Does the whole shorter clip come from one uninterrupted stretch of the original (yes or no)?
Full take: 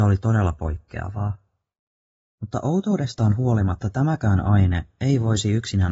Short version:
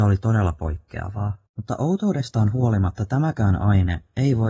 no